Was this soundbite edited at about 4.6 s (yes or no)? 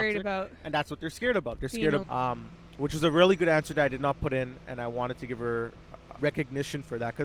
no